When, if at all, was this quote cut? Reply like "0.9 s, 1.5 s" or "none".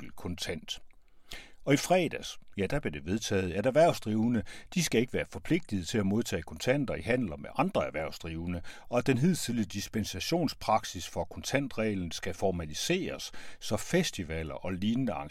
none